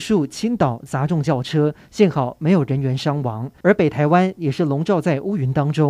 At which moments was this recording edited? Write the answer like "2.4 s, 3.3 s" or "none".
3.6 s